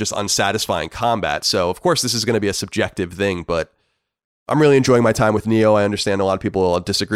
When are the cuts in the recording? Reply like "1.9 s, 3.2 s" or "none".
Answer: none

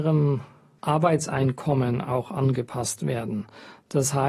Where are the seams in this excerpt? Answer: none

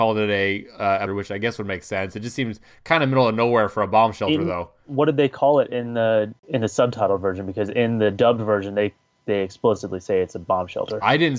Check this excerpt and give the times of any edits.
1.1 s

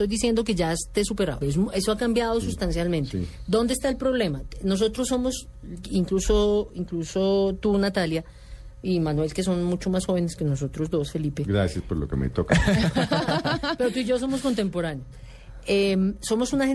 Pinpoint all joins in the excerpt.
1.4 s

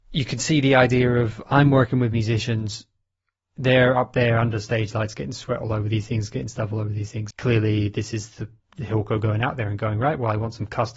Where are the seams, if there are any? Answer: 7.3 s

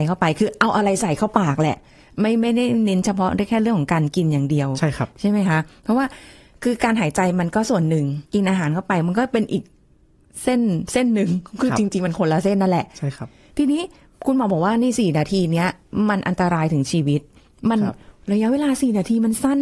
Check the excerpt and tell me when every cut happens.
8.3 s

